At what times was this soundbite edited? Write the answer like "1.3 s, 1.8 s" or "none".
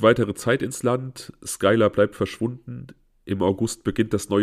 none